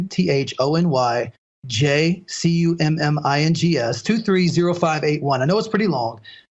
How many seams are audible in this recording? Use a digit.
1